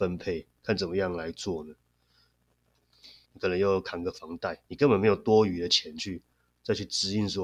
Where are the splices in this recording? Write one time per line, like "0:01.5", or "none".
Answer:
0:03.3
0:04.7